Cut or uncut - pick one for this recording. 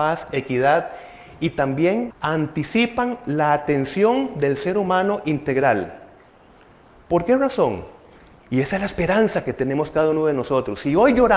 cut